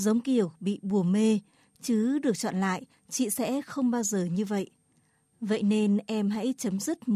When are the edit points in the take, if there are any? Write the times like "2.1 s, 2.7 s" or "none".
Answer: none